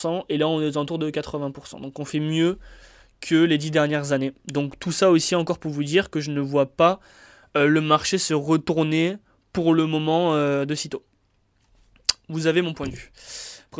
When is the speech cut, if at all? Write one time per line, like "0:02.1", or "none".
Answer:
none